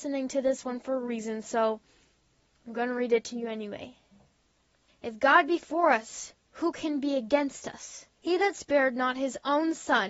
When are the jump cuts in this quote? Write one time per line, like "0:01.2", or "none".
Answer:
0:04.9
0:08.2